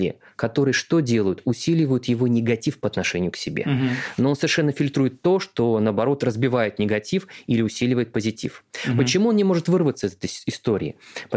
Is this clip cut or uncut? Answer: uncut